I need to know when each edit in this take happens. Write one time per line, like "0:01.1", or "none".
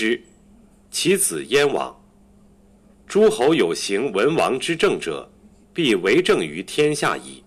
0:05.6